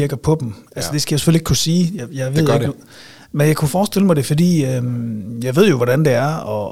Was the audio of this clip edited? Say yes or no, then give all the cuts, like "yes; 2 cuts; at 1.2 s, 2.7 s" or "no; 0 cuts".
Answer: no; 0 cuts